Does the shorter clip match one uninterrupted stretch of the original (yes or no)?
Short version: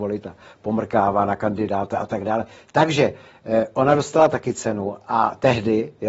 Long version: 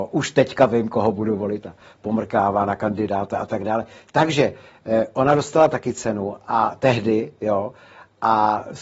yes